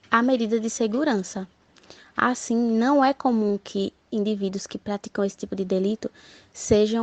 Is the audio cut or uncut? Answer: uncut